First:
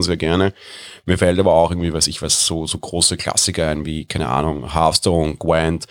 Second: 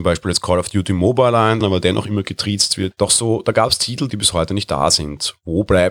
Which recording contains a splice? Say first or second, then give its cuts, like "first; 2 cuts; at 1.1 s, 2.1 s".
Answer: second; 3 cuts; at 1.6 s, 2.9 s, 4.1 s